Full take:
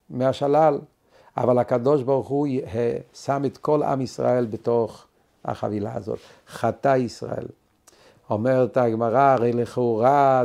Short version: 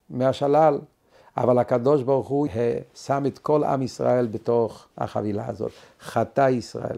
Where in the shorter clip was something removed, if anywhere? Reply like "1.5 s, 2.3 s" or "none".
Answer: 2.5 s, 4.9 s